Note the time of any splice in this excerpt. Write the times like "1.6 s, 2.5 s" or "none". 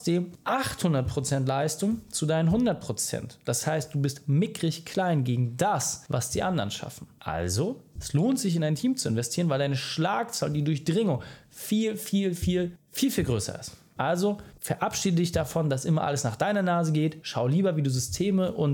12.4 s